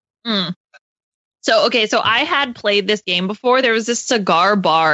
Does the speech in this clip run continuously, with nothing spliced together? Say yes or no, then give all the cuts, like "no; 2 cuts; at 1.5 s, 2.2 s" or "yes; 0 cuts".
yes; 0 cuts